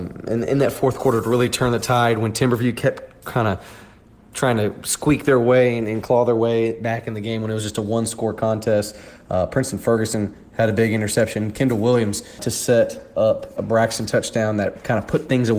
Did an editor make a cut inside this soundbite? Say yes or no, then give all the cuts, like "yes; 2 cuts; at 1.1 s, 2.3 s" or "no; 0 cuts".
yes; 2 cuts; at 12.4 s, 13.6 s